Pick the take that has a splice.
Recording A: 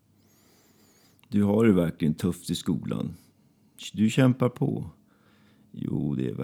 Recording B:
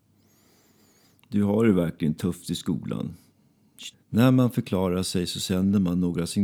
B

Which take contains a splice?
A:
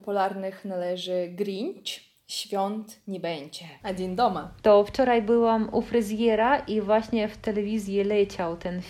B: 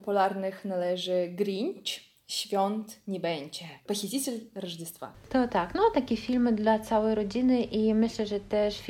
A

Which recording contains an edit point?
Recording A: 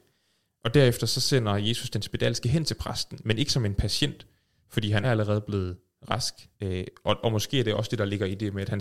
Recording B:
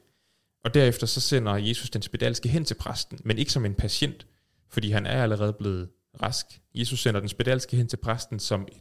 A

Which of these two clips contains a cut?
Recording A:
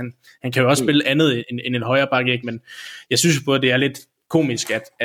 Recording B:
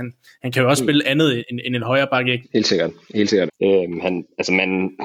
B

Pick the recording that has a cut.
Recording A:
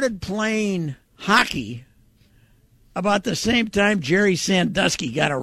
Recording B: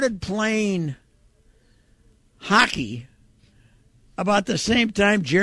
A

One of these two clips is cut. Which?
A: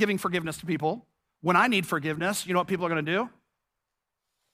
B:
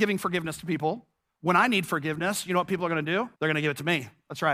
B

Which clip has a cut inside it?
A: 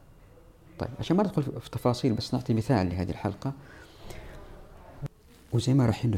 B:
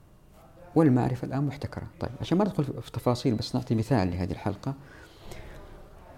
B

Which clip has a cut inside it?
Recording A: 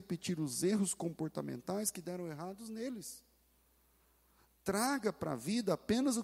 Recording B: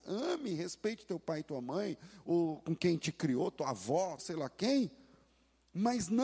B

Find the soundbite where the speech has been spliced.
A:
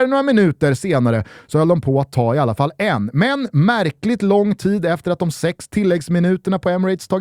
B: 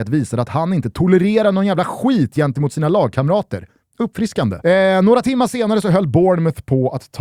B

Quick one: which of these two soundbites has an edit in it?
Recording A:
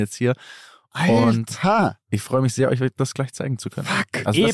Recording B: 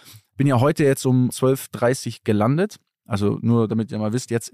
B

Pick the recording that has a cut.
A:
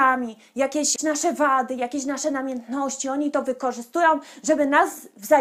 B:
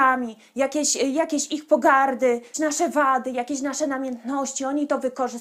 A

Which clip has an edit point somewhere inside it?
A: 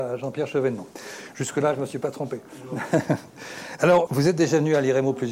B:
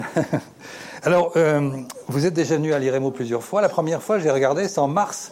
A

